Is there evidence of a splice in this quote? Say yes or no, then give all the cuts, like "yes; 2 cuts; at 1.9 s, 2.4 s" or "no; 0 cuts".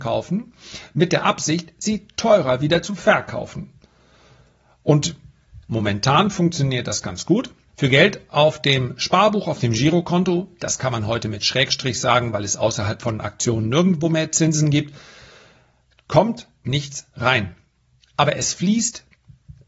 yes; 1 cut; at 7.7 s